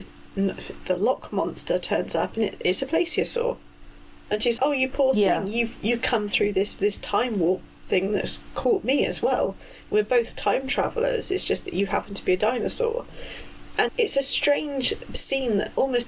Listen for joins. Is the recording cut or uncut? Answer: cut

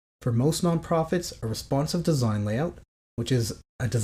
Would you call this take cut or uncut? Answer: uncut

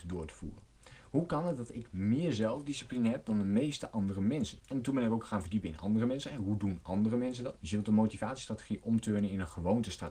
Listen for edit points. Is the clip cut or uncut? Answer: cut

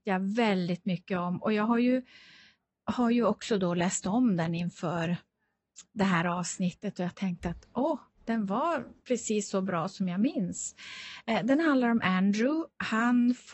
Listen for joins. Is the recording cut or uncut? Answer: uncut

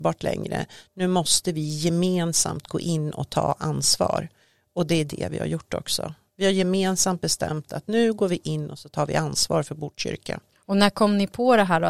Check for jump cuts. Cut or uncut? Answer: uncut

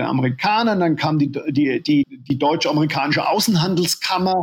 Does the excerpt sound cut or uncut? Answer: cut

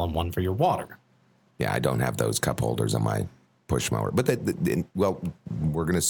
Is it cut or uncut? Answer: cut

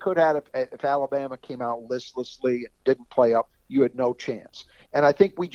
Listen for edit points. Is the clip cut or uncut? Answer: cut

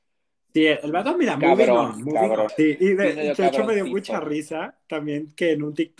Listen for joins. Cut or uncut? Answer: cut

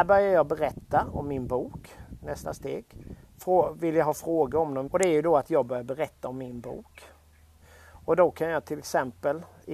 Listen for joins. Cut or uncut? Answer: cut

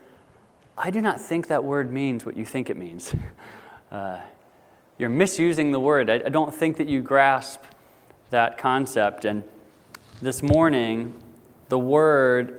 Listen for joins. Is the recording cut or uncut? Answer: uncut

